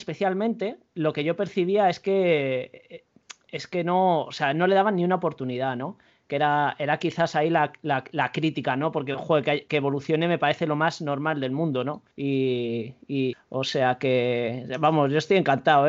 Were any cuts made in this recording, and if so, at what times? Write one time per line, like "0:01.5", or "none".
0:12.1
0:13.3